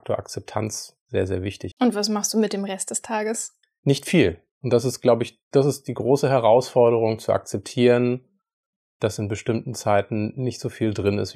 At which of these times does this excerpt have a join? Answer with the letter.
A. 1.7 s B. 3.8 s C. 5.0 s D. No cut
A